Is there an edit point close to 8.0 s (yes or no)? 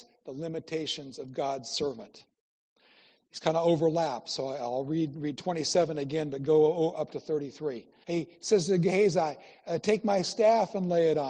yes